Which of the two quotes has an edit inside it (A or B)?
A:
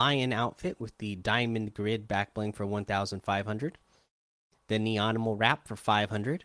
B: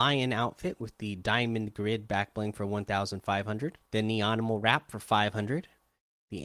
B